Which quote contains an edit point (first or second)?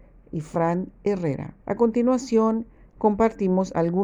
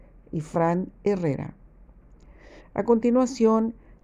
first